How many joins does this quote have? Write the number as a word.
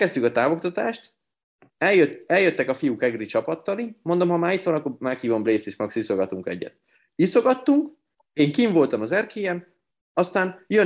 zero